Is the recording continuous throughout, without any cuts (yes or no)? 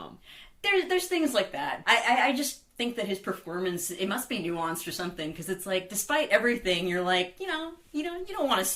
no